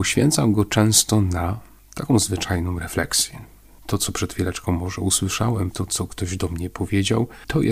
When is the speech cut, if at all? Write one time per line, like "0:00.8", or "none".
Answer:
0:03.8
0:05.7